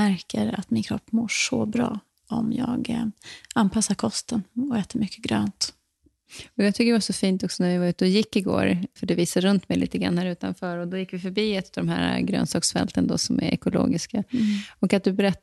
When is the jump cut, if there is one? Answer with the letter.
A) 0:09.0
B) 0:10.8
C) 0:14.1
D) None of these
A